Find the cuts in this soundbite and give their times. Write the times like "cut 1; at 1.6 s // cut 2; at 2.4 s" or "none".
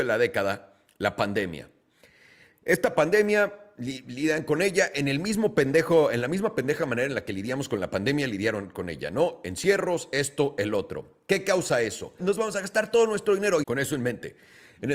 cut 1; at 12.2 s // cut 2; at 13.6 s

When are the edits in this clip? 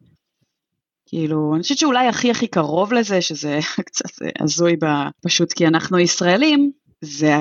cut 1; at 5.1 s

